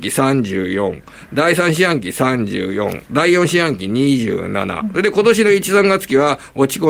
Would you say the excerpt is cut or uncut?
uncut